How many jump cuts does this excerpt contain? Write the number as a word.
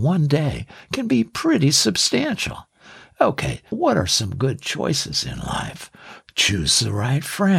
two